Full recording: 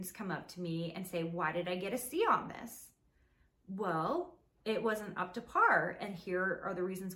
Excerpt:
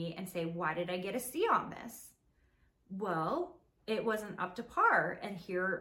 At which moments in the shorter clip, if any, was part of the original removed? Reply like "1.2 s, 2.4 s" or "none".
none